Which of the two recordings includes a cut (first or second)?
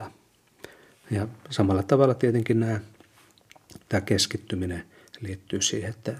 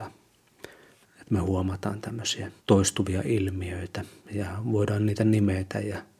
second